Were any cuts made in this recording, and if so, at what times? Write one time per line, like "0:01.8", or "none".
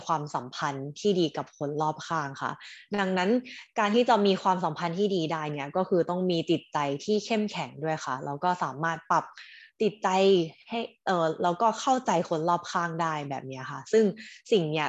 none